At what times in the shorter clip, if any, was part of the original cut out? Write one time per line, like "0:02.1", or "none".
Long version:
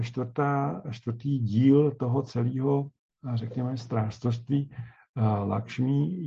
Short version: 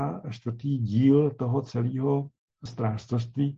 0:02.7